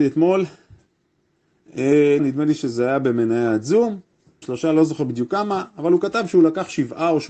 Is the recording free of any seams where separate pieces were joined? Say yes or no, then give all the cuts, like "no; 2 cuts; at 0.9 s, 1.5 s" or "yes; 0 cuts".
no; 2 cuts; at 2.2 s, 4.4 s